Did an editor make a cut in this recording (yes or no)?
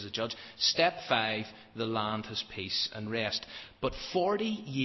no